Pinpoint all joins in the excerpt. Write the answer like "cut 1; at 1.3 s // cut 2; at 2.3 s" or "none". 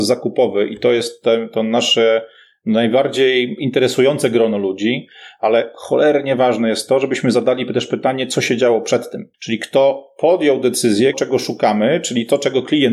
cut 1; at 9.3 s // cut 2; at 11.1 s